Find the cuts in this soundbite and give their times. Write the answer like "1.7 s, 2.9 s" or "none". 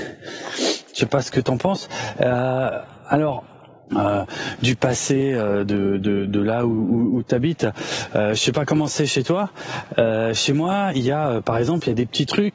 3.9 s

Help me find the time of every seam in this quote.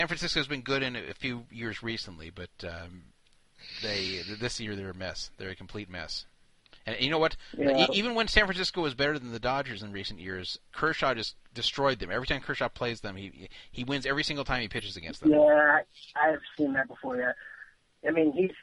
none

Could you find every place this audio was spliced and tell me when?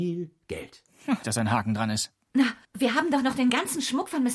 1.2 s, 2.6 s

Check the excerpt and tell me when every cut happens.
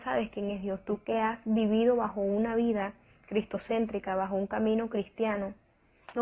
none

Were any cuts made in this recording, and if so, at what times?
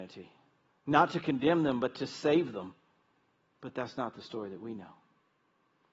3.5 s

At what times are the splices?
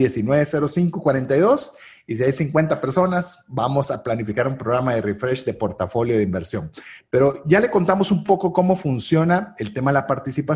none

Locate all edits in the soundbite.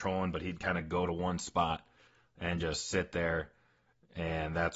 none

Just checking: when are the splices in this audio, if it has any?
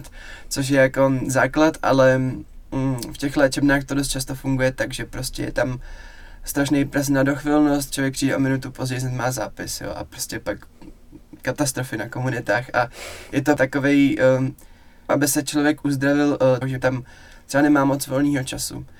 15.1 s, 16.6 s

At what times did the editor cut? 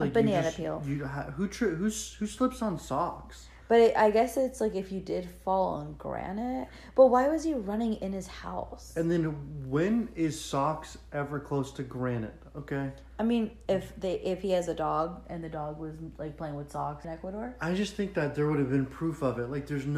13.7 s, 17.0 s

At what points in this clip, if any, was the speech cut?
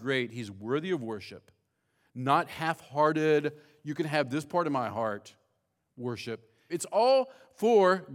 6.7 s

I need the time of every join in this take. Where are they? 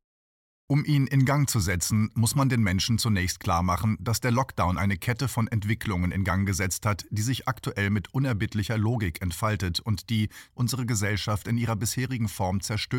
10.5 s

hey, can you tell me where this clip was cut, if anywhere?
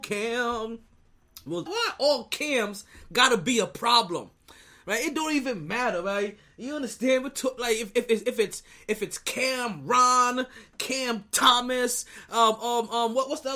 1.7 s

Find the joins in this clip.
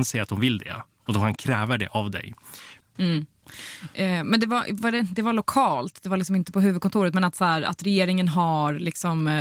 2.8 s

